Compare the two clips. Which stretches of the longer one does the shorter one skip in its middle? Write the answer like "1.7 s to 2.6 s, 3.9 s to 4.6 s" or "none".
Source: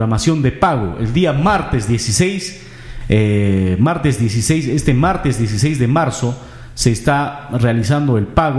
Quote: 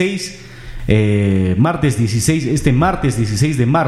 none